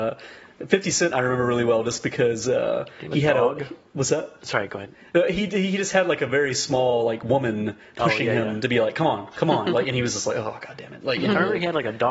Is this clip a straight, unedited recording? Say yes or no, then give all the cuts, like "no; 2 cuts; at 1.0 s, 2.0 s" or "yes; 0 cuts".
yes; 0 cuts